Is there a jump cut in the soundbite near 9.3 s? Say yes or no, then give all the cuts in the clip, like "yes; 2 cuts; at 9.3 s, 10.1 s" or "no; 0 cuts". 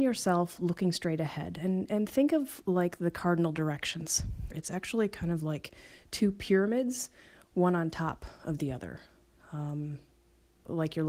no; 1 cut; at 4.5 s